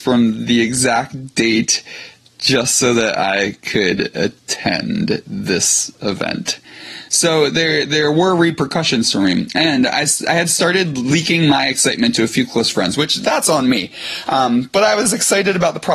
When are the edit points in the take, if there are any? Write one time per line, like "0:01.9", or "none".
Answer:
none